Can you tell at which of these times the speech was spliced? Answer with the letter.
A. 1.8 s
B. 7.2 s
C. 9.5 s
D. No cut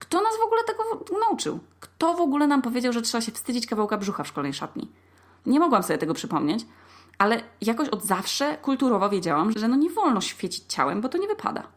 C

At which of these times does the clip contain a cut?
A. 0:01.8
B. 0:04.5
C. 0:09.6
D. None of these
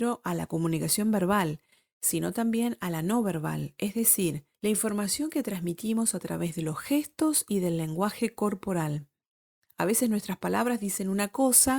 B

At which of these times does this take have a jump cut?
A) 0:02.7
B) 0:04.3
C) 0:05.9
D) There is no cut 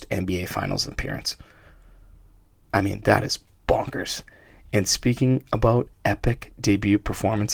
C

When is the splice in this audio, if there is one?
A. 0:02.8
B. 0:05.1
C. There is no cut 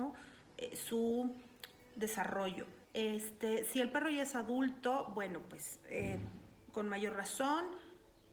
A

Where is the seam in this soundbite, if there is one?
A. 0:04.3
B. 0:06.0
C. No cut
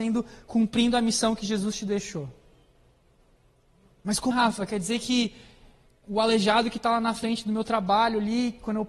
A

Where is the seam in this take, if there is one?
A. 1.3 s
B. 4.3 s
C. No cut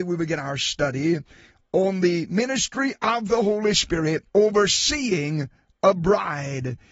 B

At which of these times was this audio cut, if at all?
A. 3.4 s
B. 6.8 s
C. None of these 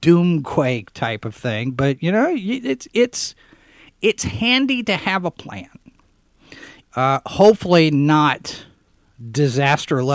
B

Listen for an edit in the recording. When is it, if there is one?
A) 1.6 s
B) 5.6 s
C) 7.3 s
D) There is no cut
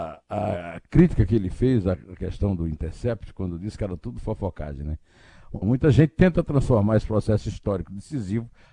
B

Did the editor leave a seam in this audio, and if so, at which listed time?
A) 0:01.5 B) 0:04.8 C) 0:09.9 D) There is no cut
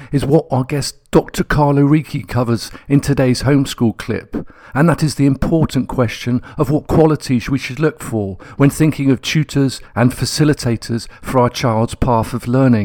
C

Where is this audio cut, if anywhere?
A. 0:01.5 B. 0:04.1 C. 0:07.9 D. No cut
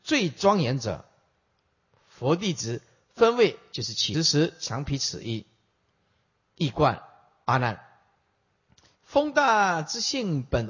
B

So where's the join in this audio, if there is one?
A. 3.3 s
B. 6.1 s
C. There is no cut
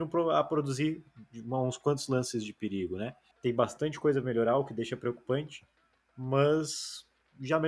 A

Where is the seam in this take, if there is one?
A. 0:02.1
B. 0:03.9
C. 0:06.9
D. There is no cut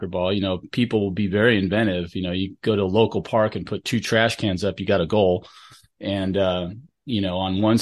D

